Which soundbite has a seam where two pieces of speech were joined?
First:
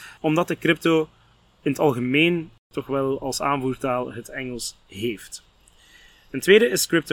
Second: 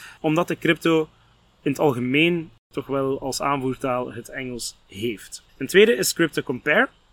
second; 1 cut; at 5.5 s

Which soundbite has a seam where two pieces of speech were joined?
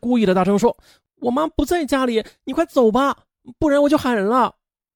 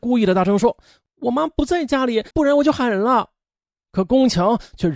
second; 1 cut; at 2.3 s

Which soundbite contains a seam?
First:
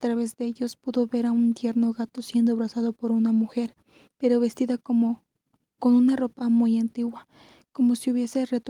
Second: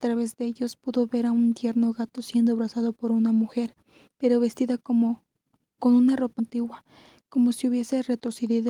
second; 1 cut; at 6.4 s

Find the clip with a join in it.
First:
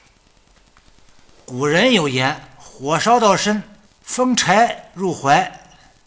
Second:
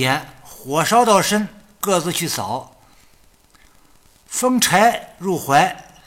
first; 1 cut; at 3.9 s

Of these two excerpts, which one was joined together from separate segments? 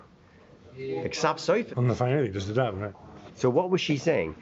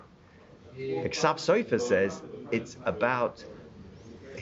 first; 2 cuts; at 1.7 s, 3.3 s

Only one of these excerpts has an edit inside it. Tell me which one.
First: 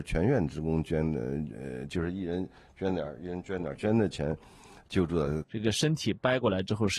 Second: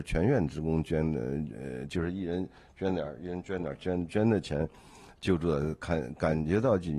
first; 2 cuts; at 3.8 s, 5.4 s

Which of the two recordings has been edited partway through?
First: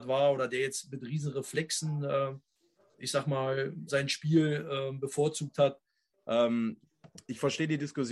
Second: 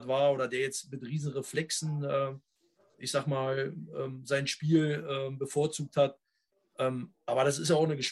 first; 2 cuts; at 3.9 s, 6.2 s

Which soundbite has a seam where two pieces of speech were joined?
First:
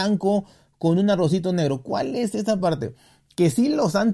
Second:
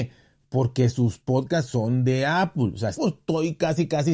second; 1 cut; at 2.9 s

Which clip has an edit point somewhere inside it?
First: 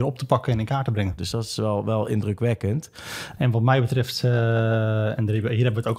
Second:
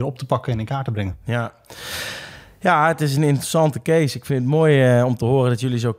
first; 2 cuts; at 1.2 s, 3.4 s

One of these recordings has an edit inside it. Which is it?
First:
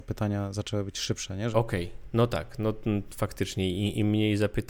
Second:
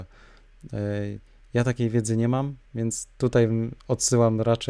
first; 1 cut; at 1.5 s

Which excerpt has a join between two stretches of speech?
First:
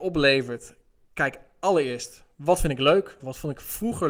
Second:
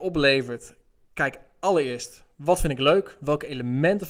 first; 1 cut; at 3.2 s

